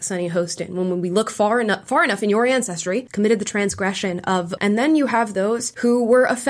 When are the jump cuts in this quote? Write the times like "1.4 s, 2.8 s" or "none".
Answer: 3.1 s, 4.6 s